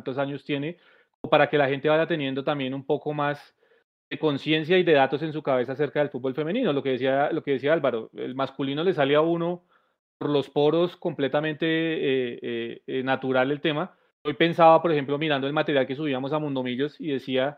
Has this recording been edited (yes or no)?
yes